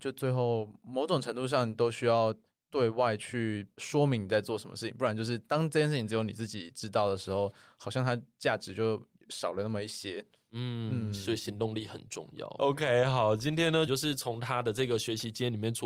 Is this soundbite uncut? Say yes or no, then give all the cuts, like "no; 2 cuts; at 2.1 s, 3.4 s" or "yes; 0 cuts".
no; 2 cuts; at 12.6 s, 13.9 s